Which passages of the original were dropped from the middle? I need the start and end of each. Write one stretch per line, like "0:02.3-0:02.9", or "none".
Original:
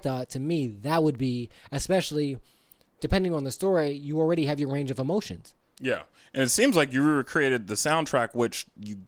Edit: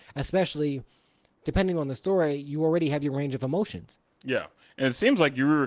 none